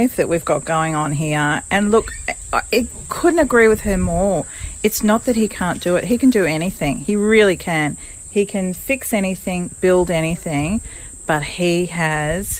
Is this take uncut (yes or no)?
yes